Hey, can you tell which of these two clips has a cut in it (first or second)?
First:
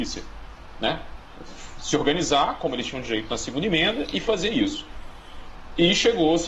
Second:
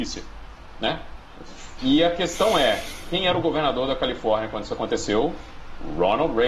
second